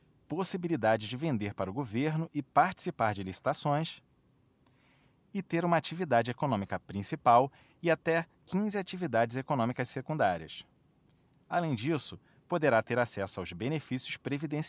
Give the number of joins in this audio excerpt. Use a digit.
0